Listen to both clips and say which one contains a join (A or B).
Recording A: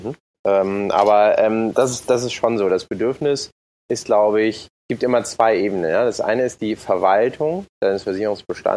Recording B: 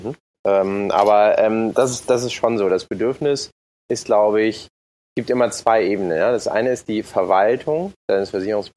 A